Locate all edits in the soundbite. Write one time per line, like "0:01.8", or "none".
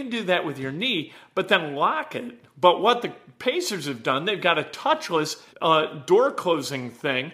0:02.5
0:05.5